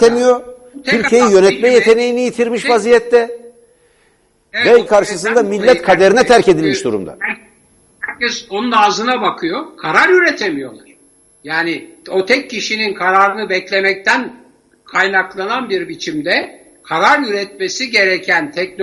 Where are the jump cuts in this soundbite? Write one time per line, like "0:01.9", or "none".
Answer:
0:04.8